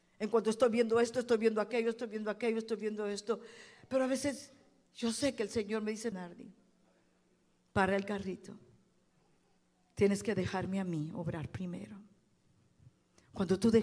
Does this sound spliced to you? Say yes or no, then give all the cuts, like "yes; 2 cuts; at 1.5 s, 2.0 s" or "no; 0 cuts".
yes; 1 cut; at 6.1 s